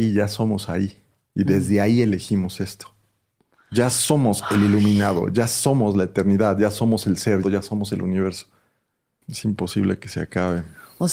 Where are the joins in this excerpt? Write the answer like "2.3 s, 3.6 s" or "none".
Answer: 7.4 s, 9.2 s